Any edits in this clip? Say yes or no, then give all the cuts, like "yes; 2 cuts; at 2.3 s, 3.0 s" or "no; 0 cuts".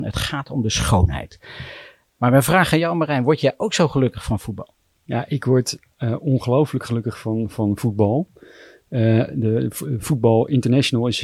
no; 0 cuts